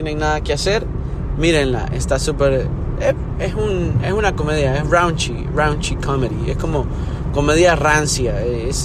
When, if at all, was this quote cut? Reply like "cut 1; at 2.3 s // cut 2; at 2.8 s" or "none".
none